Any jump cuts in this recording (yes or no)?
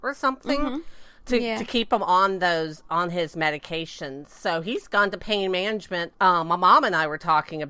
no